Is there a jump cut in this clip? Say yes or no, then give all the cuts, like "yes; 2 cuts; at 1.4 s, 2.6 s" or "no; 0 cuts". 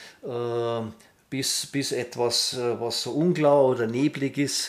no; 0 cuts